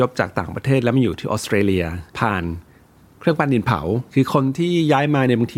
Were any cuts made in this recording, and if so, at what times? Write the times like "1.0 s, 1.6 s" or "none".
2.1 s, 4.1 s